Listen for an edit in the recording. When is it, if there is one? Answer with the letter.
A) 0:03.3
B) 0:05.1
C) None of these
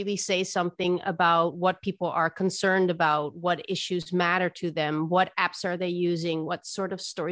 C